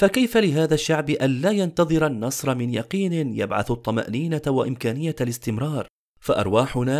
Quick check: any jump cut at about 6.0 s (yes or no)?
yes